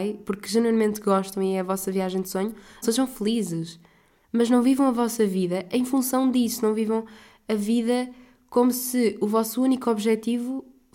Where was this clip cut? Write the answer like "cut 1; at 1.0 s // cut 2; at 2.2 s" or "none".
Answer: cut 1; at 2.8 s